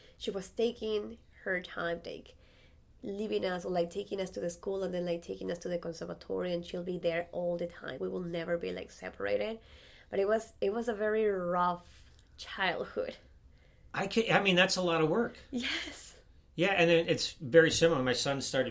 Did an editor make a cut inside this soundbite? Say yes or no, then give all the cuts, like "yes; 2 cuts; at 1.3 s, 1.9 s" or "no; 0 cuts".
yes; 2 cuts; at 2.1 s, 8.0 s